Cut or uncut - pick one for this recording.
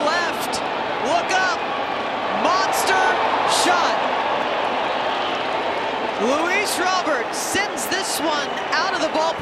uncut